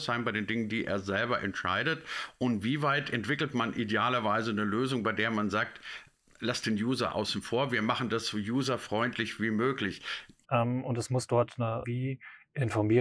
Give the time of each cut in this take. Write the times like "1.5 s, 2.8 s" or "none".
10.4 s, 11.8 s